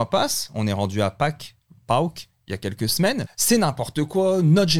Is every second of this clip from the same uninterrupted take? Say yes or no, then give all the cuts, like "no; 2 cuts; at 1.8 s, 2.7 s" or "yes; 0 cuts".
no; 1 cut; at 3.3 s